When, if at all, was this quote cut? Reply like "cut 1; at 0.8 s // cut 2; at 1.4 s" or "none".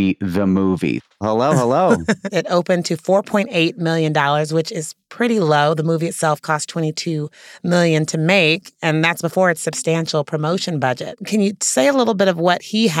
cut 1; at 1.2 s // cut 2; at 2.3 s